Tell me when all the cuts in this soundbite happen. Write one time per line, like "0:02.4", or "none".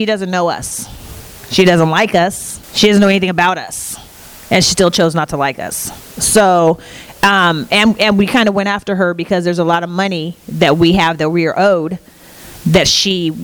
0:02.6